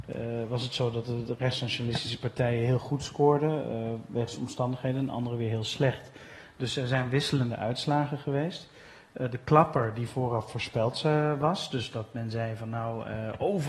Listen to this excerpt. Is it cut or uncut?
uncut